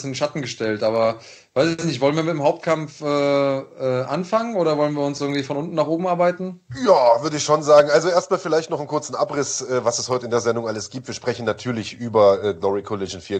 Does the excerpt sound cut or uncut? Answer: uncut